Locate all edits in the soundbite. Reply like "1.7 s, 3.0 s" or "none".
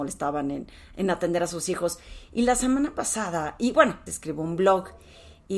2.3 s, 4.1 s